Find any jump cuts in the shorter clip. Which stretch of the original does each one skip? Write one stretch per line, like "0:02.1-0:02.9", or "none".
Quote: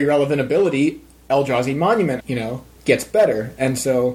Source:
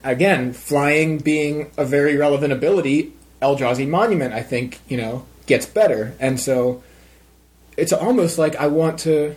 0:04.3-0:04.8

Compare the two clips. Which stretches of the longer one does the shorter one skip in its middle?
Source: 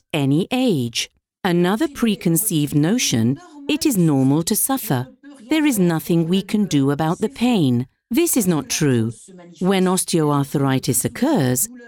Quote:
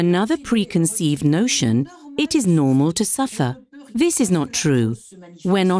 0:05.4-0:08.1

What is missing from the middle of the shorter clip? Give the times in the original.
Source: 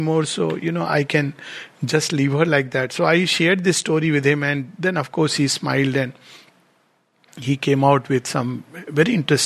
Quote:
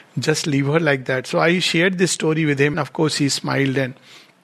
0:04.4-0:04.9

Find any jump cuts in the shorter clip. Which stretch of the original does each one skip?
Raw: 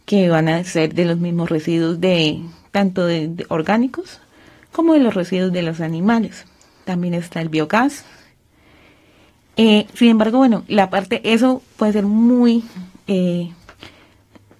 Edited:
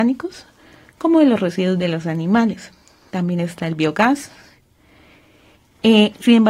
none

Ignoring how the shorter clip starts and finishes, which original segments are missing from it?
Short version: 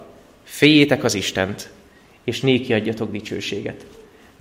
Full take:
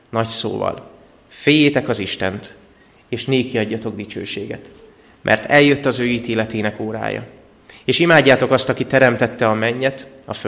none

